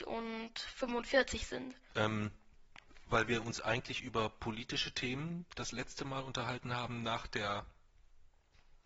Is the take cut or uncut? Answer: cut